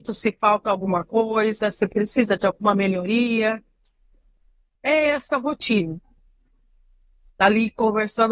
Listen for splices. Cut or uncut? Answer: cut